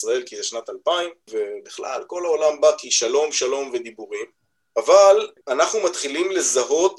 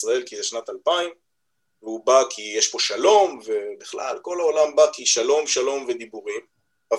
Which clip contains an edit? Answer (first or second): first